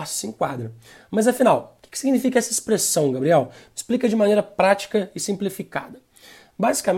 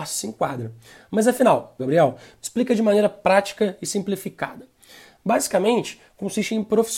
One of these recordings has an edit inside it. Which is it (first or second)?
second